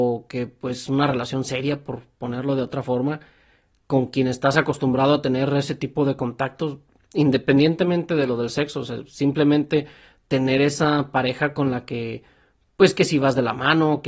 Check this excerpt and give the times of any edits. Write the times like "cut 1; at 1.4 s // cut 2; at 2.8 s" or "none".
none